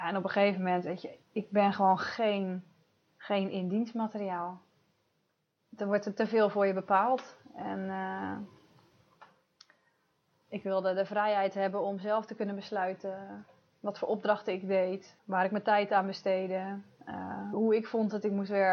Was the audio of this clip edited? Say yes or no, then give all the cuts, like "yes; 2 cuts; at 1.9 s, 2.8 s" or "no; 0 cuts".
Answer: yes; 3 cuts; at 1.2 s, 15.2 s, 17.5 s